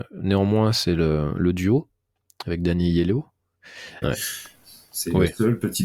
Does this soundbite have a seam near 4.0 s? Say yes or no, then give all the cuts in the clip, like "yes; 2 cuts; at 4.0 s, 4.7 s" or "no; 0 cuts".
yes; 1 cut; at 4.0 s